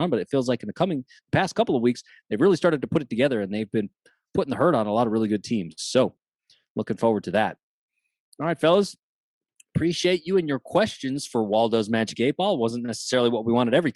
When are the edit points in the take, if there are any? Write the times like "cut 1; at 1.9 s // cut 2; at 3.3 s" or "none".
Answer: none